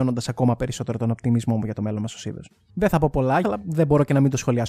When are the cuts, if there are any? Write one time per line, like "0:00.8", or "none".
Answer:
0:03.4